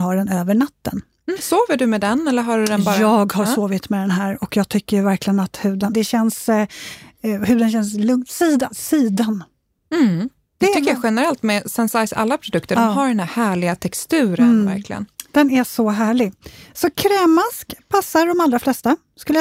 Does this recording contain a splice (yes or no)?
yes